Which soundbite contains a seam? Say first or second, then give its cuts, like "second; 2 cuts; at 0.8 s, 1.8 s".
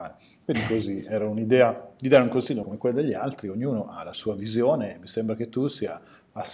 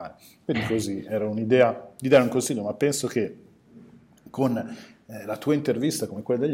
first; 1 cut; at 2.6 s